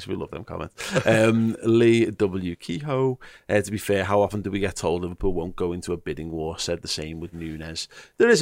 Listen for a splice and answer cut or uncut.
uncut